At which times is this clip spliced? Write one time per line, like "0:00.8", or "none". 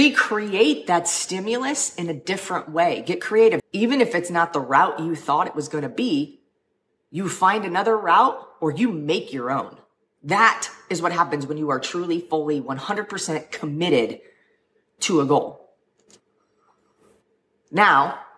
0:03.6